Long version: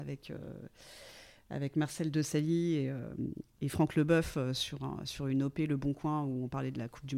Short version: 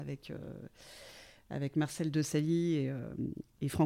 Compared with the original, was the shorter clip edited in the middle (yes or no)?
no